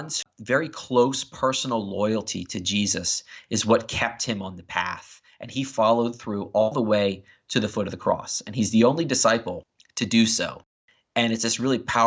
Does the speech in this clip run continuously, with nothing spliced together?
yes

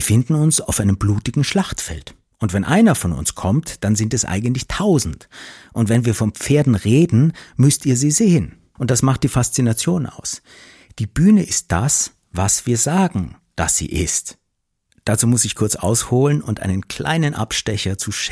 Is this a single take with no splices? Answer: no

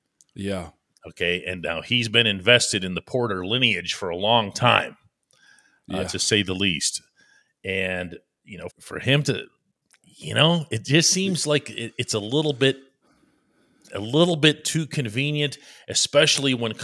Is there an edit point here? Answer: yes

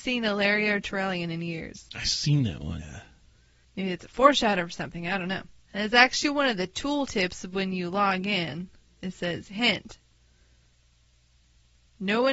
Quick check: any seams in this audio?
yes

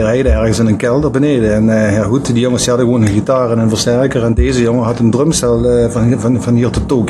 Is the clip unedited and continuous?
yes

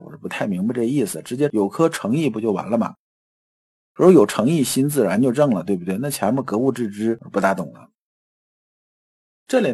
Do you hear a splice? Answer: no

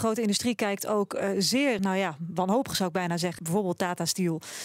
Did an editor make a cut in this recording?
yes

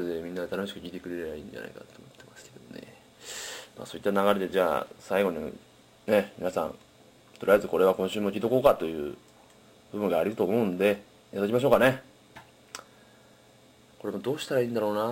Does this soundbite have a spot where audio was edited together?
yes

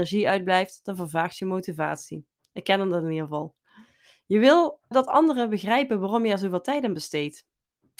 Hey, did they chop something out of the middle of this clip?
yes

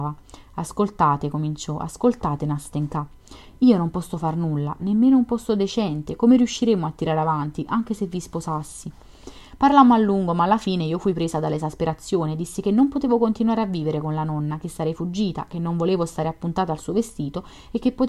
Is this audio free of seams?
no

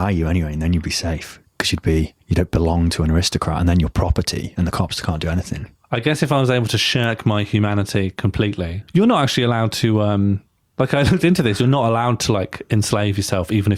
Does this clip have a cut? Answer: no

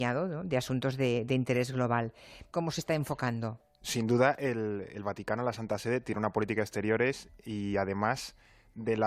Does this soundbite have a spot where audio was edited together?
yes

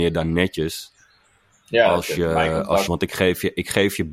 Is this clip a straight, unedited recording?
no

